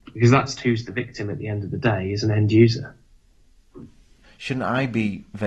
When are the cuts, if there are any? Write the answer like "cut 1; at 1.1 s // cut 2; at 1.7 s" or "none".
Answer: cut 1; at 4.2 s